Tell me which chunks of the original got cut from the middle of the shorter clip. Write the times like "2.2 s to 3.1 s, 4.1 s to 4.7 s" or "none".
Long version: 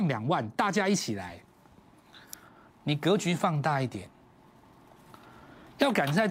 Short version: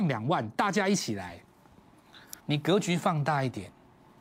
2.4 s to 2.8 s